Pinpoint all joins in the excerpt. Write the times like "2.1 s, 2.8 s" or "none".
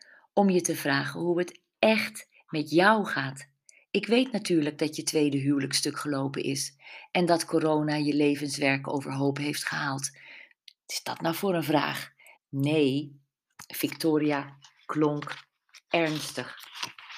10.5 s, 12.3 s